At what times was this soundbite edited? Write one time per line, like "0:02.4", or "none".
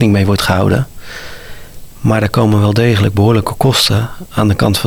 none

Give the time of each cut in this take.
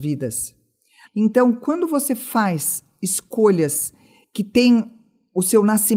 0:01.0

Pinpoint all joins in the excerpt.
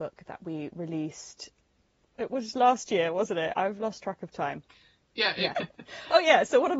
0:05.5

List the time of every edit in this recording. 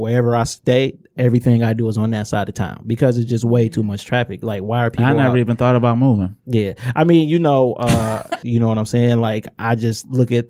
0:08.4

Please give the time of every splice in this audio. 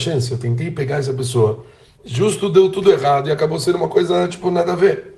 0:01.9

